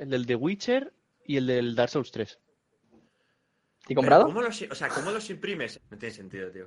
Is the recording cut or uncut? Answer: cut